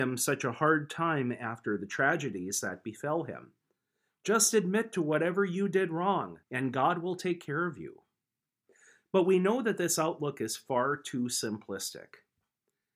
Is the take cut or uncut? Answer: cut